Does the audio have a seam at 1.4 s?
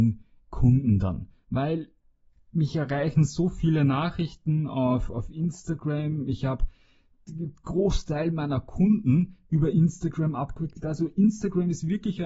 no; 0 cuts

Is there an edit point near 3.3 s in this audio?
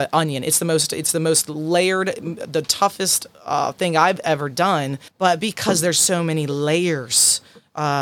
no; 1 cut; at 5.1 s

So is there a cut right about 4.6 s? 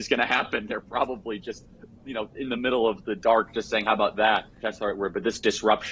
yes; 1 cut; at 4.6 s

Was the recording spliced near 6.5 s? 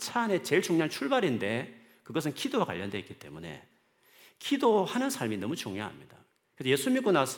no; 0 cuts

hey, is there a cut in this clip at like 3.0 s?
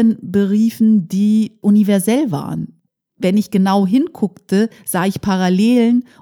yes; 1 cut; at 3.0 s

